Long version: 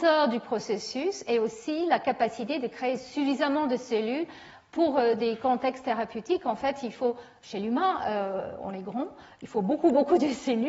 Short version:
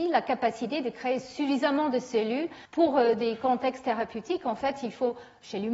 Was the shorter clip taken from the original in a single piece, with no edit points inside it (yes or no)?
no